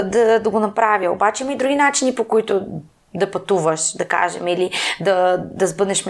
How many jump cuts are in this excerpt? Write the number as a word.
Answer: zero